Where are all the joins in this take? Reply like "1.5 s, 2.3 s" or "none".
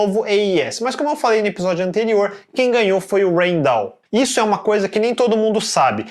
4.1 s